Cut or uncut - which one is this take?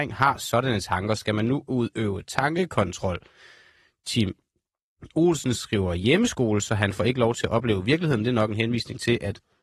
uncut